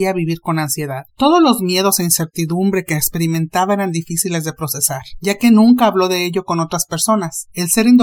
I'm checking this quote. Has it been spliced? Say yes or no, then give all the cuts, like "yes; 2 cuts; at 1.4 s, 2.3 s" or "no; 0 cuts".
yes; 1 cut; at 1.1 s